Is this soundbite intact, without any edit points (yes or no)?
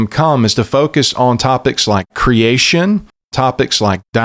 yes